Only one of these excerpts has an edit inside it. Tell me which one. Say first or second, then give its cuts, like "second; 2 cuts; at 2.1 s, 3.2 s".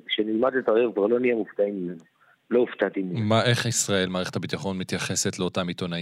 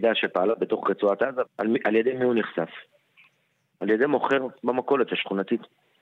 second; 1 cut; at 1.5 s